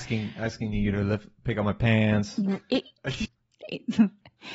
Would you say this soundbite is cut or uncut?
cut